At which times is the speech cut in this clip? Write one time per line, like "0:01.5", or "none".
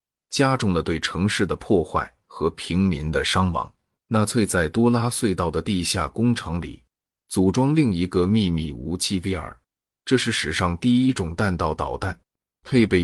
0:04.0

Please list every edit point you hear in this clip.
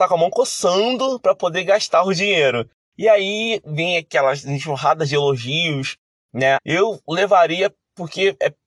0:06.6

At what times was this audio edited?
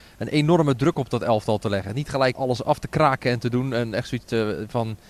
0:02.3

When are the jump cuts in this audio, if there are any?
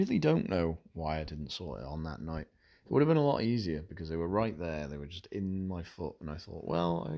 none

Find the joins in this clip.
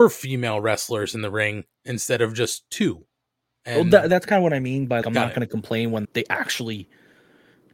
0:05.0
0:06.0

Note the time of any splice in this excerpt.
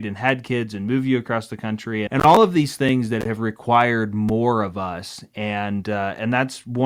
0:02.1

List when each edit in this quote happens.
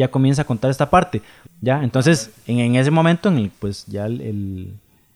0:01.5
0:03.5

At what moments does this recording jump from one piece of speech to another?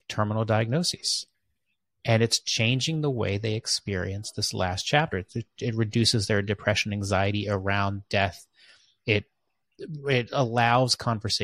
0:05.1

